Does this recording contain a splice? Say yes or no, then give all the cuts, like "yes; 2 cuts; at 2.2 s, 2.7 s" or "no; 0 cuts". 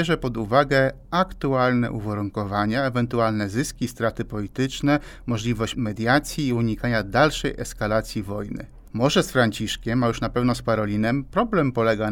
no; 0 cuts